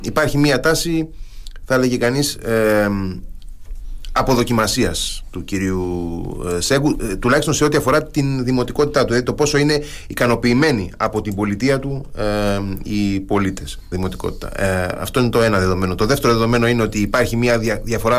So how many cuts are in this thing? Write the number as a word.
one